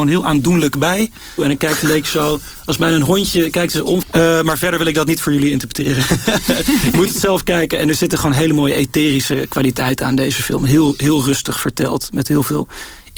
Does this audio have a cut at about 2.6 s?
no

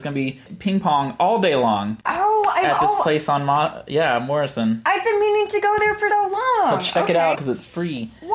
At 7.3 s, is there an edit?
yes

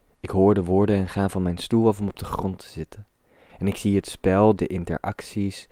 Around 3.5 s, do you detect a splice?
yes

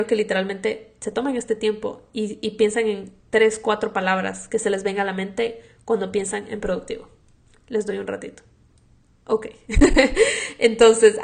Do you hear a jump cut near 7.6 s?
no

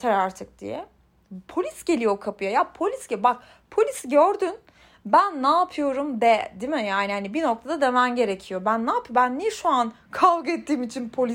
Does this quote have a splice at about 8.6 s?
no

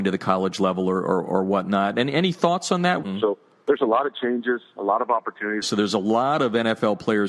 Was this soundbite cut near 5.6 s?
yes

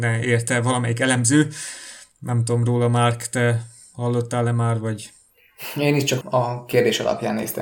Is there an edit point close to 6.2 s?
yes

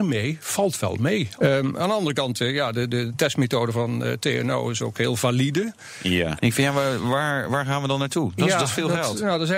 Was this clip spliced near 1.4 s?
yes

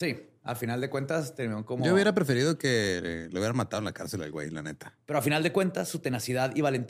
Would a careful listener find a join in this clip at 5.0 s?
yes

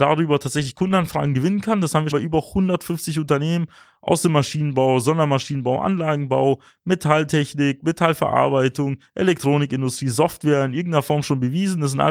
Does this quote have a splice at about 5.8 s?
no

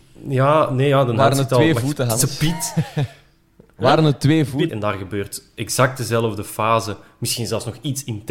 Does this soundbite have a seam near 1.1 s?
no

